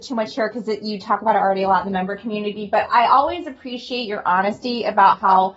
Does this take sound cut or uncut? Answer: uncut